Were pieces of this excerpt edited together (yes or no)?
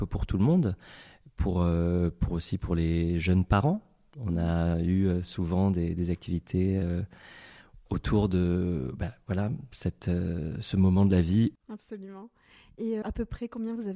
yes